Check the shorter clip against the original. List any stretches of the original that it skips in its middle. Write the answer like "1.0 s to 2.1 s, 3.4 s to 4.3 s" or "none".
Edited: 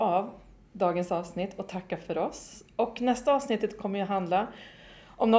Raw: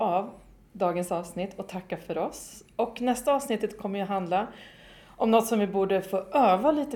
none